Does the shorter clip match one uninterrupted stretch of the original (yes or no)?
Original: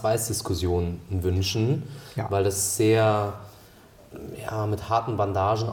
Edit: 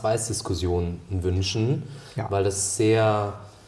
yes